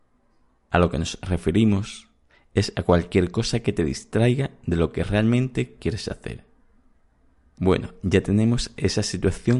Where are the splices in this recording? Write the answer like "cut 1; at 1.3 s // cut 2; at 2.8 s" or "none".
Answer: none